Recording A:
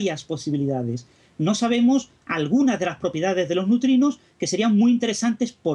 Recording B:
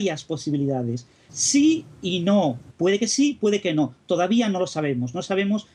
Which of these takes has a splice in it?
B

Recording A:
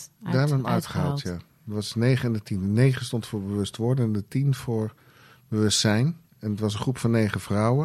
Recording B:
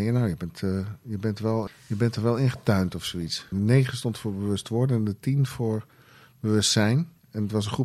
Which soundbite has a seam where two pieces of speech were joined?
B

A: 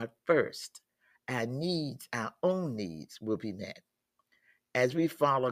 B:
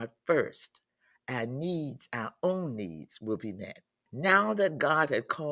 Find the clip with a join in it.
B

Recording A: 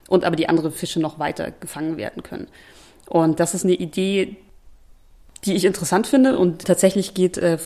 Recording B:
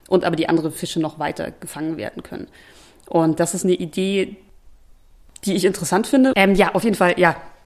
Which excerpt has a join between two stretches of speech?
B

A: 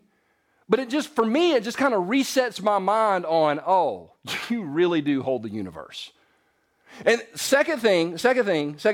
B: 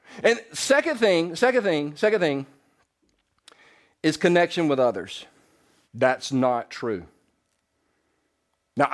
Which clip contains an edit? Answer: B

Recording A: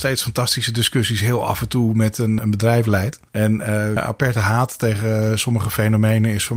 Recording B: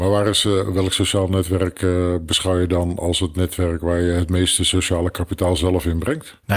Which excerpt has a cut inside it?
A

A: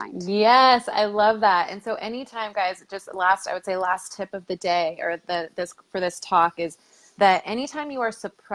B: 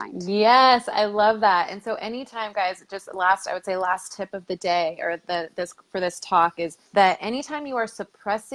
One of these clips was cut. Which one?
B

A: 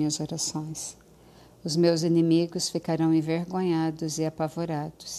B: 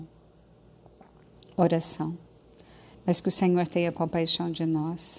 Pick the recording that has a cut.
B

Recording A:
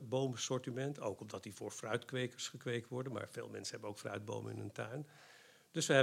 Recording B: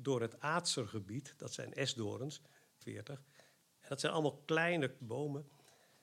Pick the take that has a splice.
B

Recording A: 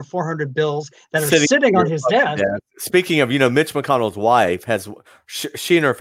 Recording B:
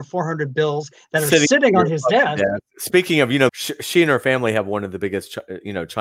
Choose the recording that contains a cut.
B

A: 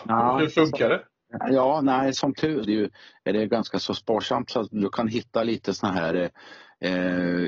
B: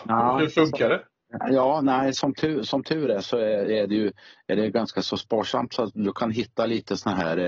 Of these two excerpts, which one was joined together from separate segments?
A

